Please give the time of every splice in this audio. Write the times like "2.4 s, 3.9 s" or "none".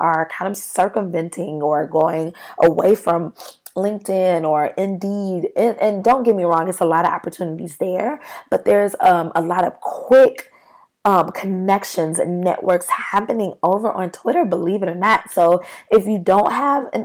none